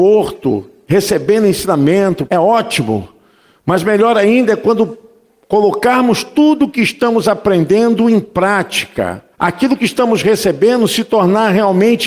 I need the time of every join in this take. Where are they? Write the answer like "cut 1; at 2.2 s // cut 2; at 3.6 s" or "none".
cut 1; at 2.3 s // cut 2; at 9.3 s